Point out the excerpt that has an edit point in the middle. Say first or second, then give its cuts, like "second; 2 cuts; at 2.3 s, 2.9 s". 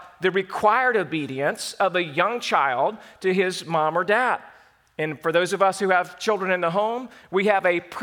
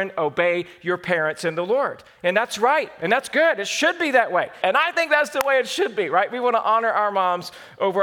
second; 1 cut; at 4.6 s